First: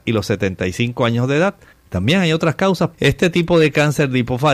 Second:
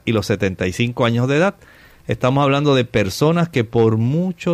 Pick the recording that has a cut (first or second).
first